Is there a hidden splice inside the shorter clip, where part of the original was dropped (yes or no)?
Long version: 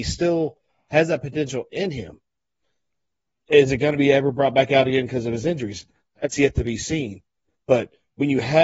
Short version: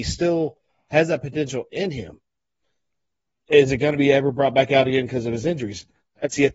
no